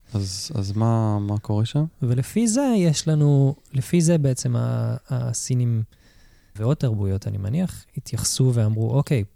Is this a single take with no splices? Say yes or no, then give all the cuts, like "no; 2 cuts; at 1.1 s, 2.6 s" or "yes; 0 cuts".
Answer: no; 2 cuts; at 1.9 s, 6.6 s